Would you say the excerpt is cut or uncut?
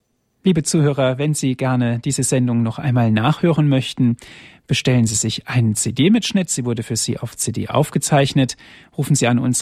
uncut